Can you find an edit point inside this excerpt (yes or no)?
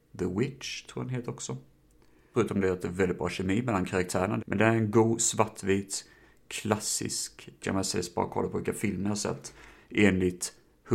yes